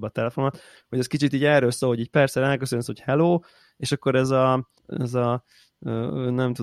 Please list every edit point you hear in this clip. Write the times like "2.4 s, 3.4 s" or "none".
4.8 s